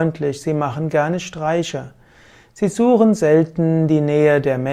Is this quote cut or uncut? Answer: uncut